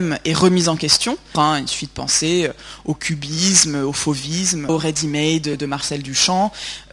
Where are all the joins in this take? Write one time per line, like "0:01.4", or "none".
0:01.3
0:04.7